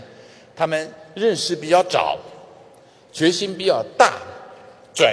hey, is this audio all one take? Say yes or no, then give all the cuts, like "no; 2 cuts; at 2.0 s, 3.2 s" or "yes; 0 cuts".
yes; 0 cuts